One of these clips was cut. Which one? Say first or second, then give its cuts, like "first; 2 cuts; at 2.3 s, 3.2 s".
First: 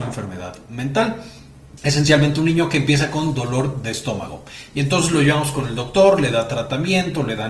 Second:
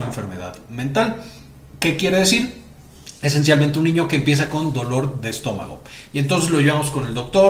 first; 1 cut; at 1.8 s